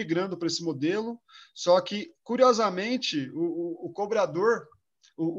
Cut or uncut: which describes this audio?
uncut